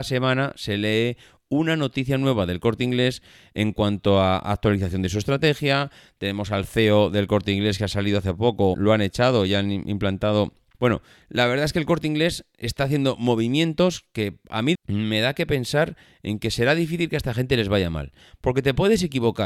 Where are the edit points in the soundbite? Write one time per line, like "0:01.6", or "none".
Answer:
0:08.7
0:10.7
0:14.7